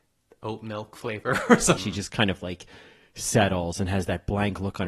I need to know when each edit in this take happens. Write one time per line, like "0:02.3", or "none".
0:01.8